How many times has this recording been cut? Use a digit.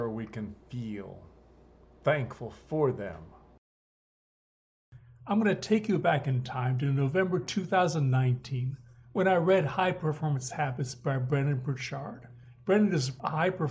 0